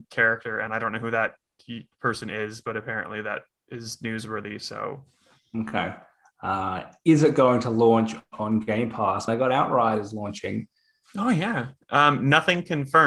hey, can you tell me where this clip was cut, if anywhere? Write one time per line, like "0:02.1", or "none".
0:09.3